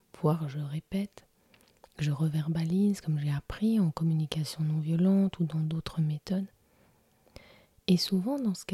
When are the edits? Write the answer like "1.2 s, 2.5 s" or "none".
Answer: none